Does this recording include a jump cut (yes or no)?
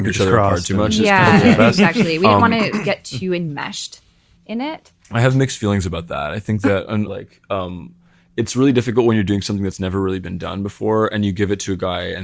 yes